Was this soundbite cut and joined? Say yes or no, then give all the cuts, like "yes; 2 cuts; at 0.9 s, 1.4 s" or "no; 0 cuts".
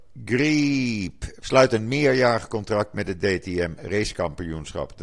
yes; 1 cut; at 1.4 s